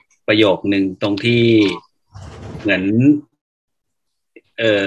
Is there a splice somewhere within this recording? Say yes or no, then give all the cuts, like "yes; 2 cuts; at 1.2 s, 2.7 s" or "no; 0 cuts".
no; 0 cuts